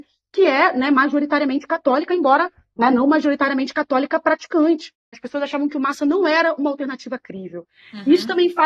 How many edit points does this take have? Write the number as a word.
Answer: one